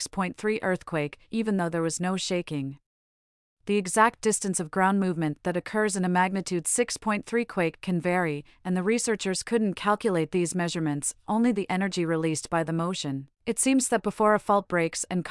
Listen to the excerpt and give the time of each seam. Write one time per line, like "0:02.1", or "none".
0:13.3